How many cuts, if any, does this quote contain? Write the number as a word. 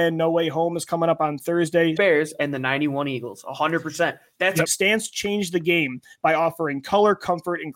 two